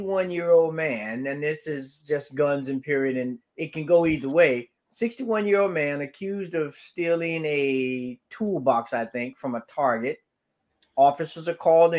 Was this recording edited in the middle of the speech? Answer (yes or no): yes